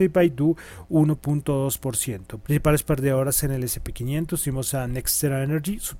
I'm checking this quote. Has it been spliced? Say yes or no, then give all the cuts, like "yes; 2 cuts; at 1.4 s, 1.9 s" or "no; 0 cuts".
yes; 1 cut; at 2.4 s